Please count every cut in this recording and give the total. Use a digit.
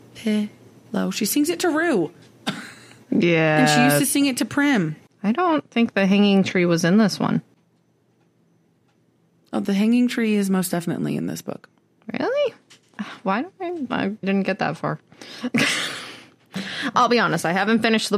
1